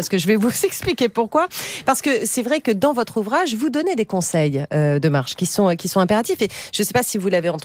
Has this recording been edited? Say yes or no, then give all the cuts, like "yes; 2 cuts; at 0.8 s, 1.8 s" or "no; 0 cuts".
no; 0 cuts